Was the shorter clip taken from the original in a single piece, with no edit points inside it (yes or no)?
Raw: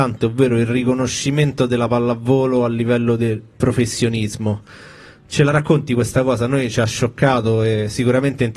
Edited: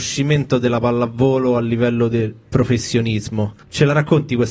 no